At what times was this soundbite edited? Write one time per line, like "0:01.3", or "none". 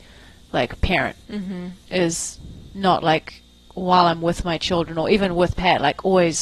none